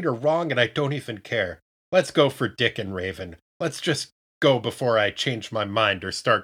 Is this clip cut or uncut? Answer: cut